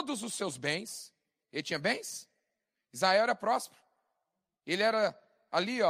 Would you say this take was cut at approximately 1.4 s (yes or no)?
yes